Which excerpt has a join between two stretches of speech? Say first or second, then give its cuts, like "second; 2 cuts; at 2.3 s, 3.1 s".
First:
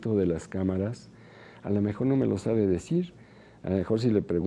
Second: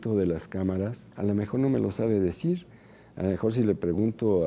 second; 1 cut; at 1.1 s